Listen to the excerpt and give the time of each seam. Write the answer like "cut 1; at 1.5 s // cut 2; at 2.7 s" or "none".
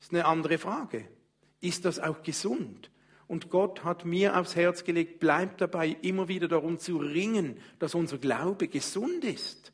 none